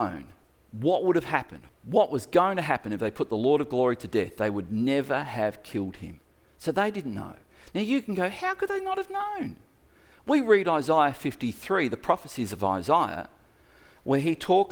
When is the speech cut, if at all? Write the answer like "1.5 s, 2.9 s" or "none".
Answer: none